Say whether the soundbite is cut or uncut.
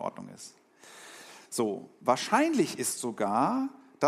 uncut